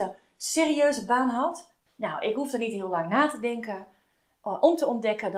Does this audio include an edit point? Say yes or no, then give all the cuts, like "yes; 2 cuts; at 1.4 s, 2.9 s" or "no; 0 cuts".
yes; 1 cut; at 1.9 s